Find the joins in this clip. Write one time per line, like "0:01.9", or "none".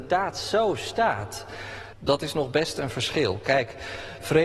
0:01.9